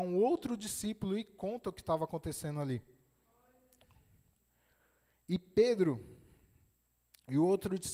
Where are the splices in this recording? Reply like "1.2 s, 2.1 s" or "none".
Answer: none